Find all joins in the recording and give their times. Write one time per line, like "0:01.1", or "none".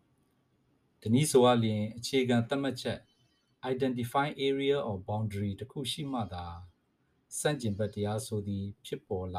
none